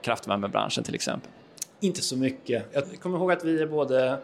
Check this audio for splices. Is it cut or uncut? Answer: cut